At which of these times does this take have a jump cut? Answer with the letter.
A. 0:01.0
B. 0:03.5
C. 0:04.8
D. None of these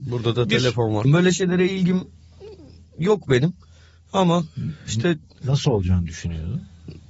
A